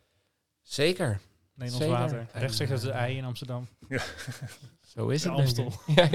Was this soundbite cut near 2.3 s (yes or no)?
yes